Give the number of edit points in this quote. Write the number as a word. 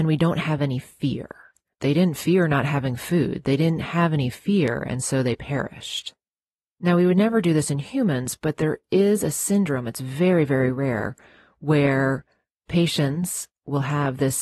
one